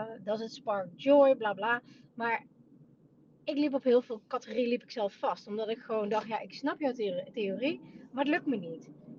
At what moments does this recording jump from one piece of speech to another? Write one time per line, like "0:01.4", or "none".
none